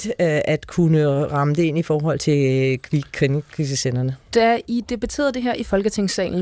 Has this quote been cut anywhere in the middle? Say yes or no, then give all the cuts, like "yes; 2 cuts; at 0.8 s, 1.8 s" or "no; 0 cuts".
no; 0 cuts